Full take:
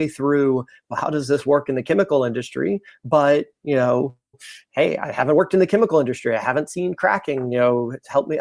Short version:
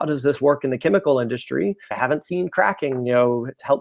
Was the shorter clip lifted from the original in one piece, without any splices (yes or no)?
no